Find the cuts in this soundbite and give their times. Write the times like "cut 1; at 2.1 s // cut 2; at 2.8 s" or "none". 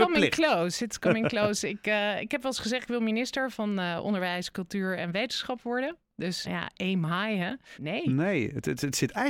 cut 1; at 6.4 s // cut 2; at 7.7 s